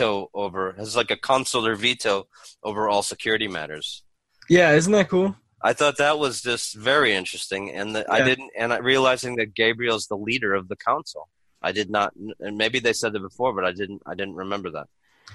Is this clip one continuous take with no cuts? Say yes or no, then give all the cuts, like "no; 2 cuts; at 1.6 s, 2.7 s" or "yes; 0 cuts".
yes; 0 cuts